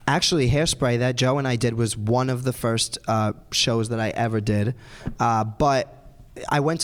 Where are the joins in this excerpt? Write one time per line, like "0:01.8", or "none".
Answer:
none